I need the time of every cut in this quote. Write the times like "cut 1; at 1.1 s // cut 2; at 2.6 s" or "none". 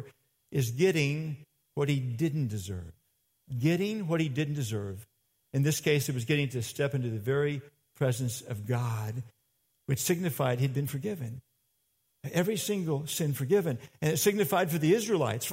none